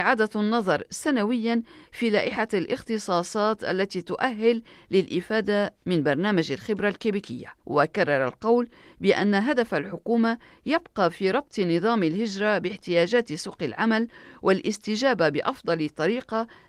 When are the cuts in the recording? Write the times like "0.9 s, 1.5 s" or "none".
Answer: 7.6 s